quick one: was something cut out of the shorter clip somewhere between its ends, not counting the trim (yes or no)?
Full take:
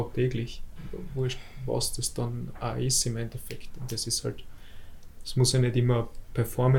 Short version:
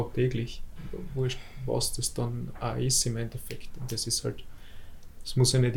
no